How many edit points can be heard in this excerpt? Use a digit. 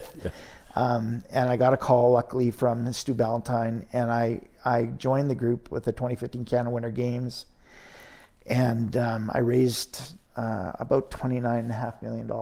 0